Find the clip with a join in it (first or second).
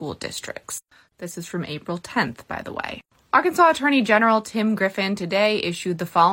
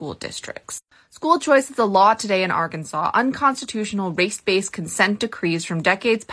first